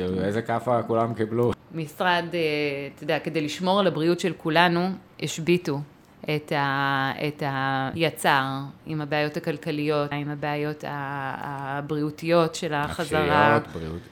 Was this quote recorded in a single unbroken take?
no; 3 cuts; at 1.5 s, 7.9 s, 10.1 s

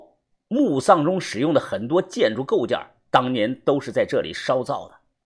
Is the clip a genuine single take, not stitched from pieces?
yes; 0 cuts

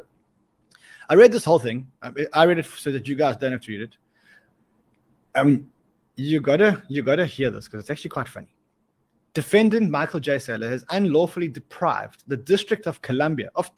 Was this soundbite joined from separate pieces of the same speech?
no; 0 cuts

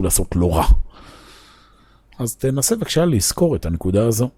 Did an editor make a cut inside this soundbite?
no; 0 cuts

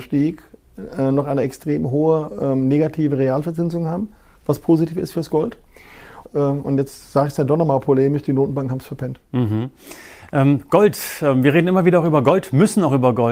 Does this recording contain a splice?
yes; 1 cut; at 6.3 s

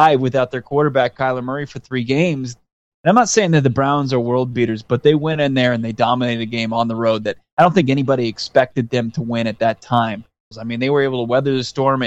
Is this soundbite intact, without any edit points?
no; 2 cuts; at 2.9 s, 10.5 s

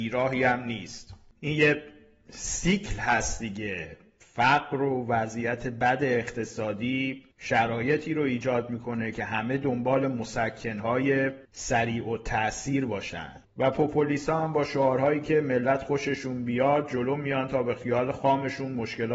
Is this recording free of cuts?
no; 2 cuts; at 7.3 s, 11.4 s

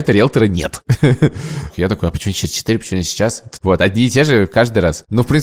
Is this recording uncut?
no; 2 cuts; at 1.7 s, 3.6 s

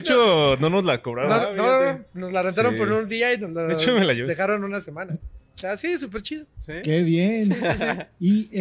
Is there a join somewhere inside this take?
no; 0 cuts

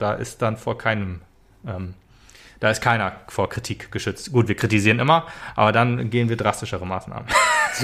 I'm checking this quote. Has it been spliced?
no; 0 cuts

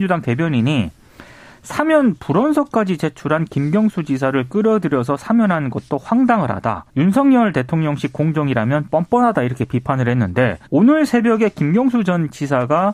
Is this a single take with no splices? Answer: no; 2 cuts; at 6.9 s, 10.7 s

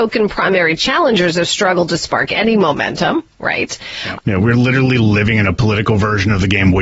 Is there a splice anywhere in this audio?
yes; 1 cut; at 4.2 s

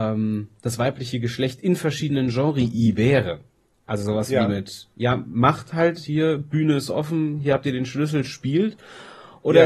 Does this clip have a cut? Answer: no; 0 cuts

